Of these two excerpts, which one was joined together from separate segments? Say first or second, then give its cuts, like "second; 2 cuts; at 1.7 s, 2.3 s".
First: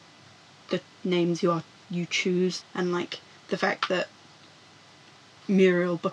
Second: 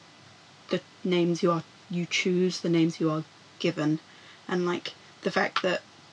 first; 1 cut; at 2.6 s